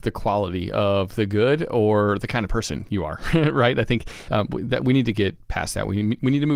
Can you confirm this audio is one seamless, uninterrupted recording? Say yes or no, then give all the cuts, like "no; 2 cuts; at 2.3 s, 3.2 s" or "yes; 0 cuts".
yes; 0 cuts